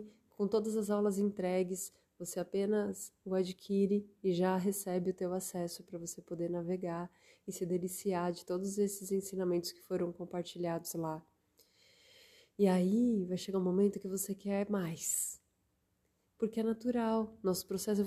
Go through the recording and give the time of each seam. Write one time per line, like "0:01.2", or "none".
none